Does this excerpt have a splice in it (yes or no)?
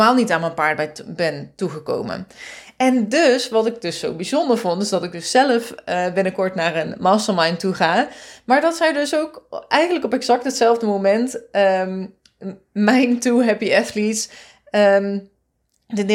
no